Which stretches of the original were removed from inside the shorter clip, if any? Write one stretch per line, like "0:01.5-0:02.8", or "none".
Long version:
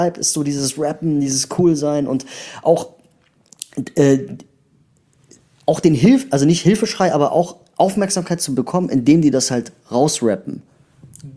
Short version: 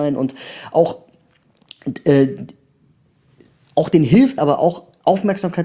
0:06.3-0:07.1